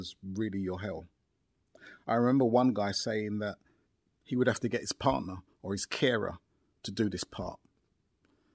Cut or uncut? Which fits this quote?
uncut